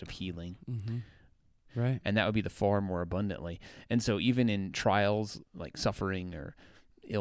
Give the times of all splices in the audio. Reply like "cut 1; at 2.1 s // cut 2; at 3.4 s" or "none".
cut 1; at 1.7 s